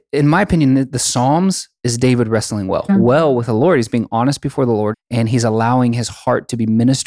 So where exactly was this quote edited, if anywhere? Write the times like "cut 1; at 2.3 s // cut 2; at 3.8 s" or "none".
cut 1; at 2.9 s // cut 2; at 4.9 s